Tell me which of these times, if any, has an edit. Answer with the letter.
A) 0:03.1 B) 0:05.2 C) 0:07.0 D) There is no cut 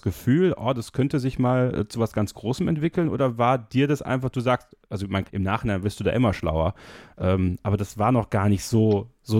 B